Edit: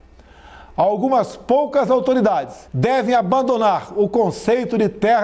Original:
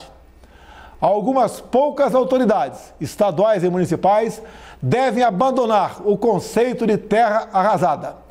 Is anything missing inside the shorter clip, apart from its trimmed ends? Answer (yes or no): yes